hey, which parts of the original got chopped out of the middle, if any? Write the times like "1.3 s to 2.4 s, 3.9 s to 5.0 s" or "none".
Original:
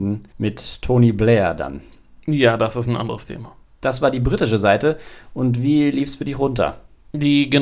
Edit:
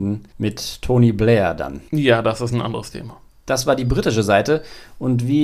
1.9 s to 2.2 s